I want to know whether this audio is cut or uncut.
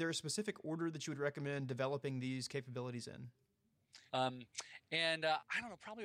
cut